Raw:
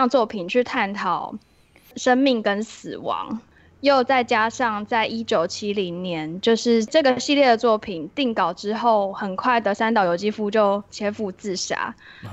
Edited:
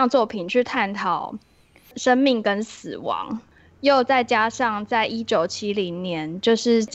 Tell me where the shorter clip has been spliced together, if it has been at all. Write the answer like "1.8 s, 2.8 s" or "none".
none